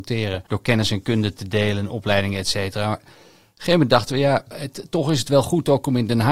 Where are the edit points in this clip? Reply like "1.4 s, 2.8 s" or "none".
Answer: none